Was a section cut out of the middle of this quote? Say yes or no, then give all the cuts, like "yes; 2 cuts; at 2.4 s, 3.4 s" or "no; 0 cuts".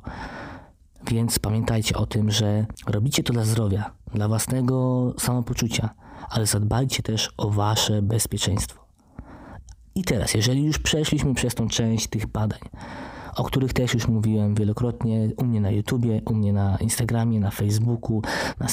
no; 0 cuts